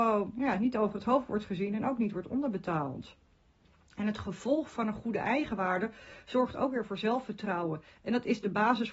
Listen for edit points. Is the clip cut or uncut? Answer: uncut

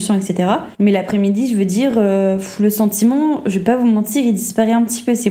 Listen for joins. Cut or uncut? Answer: uncut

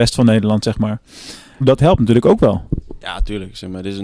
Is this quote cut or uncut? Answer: cut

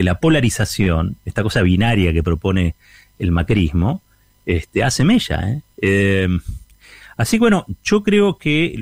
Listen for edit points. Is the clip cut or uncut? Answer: cut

